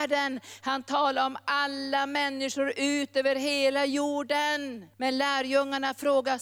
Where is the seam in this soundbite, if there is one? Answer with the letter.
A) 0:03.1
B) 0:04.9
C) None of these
B